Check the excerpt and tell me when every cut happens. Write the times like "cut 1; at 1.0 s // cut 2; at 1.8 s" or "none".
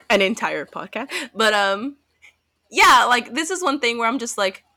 none